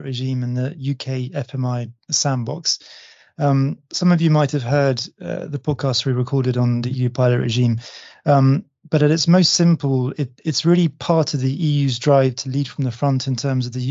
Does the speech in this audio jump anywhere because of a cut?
no; 0 cuts

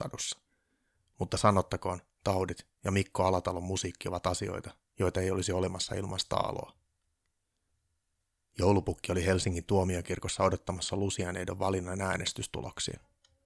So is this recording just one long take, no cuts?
no; 1 cut; at 2.2 s

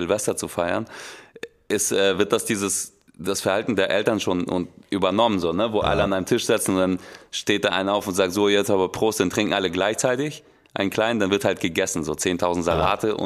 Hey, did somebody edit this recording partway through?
no; 0 cuts

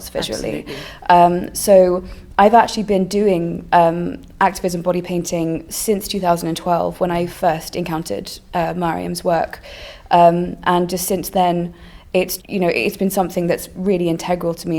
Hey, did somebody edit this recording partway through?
yes; 1 cut; at 12.4 s

